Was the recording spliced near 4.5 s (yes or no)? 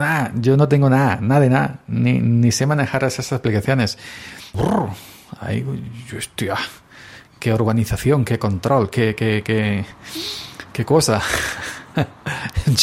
yes